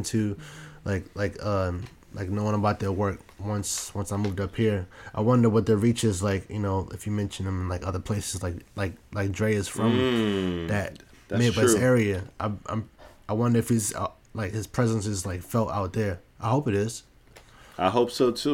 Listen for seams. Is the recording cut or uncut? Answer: uncut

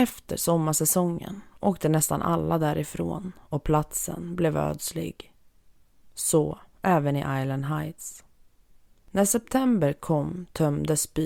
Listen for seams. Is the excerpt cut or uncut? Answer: uncut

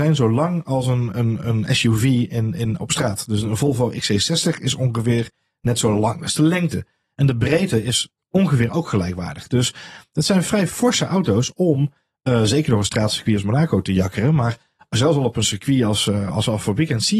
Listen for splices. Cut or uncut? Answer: cut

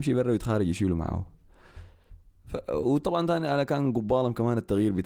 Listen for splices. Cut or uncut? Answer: uncut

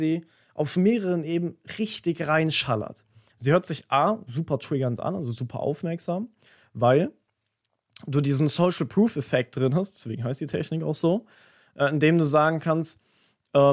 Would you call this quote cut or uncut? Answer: uncut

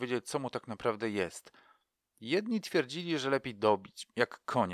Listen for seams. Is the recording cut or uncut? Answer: uncut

